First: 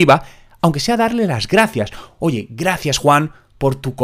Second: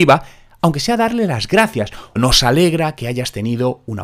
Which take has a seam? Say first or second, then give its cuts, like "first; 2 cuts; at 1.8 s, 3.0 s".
second; 1 cut; at 2.2 s